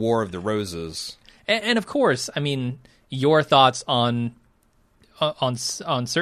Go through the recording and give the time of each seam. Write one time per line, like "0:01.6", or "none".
none